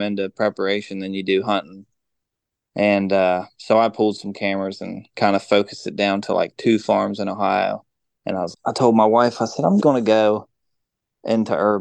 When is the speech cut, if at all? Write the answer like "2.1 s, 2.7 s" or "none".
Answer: 8.5 s, 9.8 s